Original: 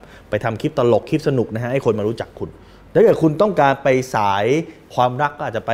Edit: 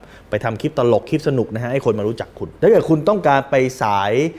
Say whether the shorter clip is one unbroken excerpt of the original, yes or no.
no